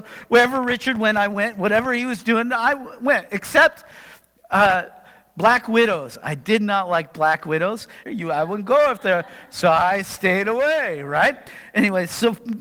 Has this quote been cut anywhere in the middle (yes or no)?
yes